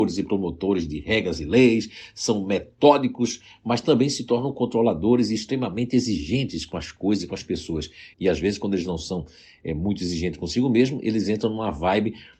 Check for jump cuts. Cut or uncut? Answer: cut